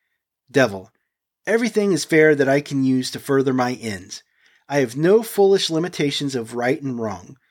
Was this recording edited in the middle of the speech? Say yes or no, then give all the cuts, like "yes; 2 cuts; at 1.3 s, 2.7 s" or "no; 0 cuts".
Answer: no; 0 cuts